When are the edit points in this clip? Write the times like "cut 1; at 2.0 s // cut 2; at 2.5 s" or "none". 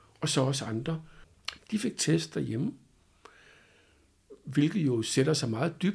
cut 1; at 1.6 s